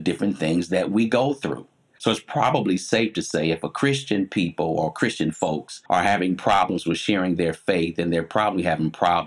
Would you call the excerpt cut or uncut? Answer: uncut